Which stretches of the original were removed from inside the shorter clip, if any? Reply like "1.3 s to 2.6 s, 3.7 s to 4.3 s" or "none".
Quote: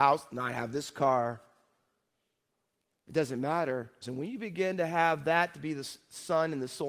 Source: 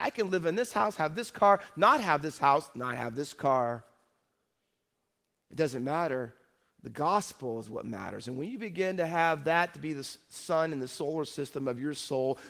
6.4 s to 8.2 s